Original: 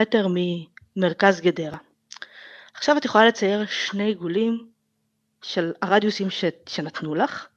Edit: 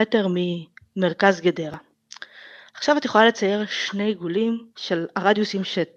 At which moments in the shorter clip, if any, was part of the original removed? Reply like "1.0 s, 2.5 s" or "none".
4.7 s